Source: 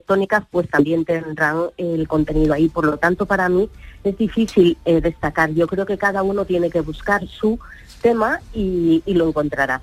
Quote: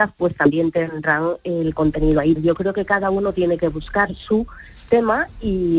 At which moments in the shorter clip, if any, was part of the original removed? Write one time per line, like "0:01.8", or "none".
0:02.4